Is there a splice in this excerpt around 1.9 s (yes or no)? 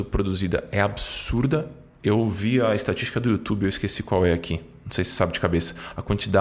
no